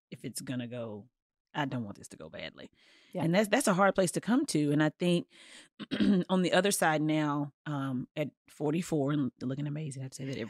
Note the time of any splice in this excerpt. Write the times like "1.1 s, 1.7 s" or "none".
7.6 s, 9.4 s